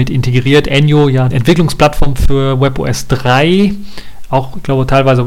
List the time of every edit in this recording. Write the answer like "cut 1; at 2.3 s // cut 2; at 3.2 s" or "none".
cut 1; at 1.3 s